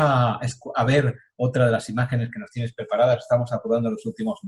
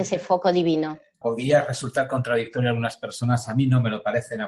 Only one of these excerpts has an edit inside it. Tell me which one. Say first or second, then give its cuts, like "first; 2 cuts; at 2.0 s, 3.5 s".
second; 1 cut; at 1.2 s